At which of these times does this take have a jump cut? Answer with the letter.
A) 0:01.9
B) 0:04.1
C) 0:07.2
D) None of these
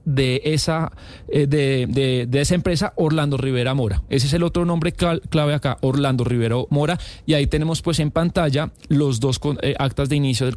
D